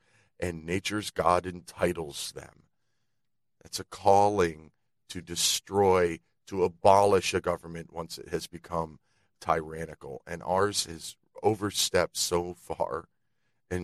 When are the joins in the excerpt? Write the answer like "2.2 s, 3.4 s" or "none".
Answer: none